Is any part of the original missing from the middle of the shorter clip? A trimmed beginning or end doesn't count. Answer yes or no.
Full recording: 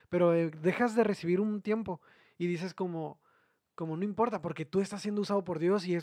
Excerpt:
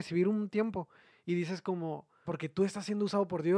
yes